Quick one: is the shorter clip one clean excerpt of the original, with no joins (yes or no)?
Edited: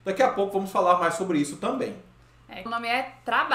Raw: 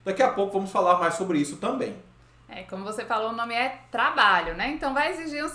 no